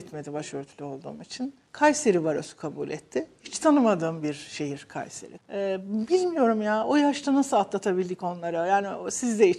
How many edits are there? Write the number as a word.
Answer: two